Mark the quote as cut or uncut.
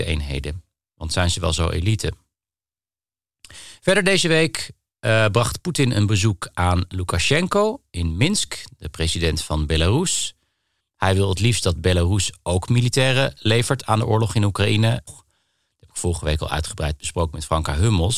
cut